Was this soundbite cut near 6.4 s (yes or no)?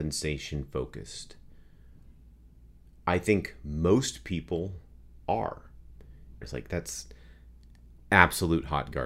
yes